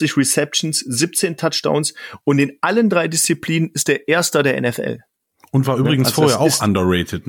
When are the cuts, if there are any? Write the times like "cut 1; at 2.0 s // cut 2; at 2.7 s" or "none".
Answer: none